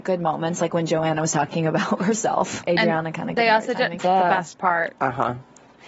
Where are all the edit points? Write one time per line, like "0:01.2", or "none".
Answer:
0:02.6
0:04.0